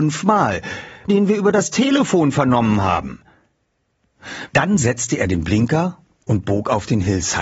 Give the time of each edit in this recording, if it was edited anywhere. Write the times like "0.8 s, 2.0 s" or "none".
1.1 s, 4.5 s